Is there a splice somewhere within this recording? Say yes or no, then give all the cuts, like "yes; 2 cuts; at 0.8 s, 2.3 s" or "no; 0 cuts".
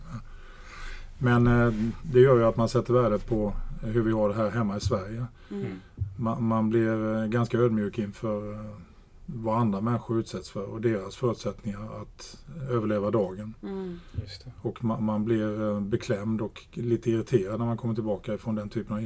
no; 0 cuts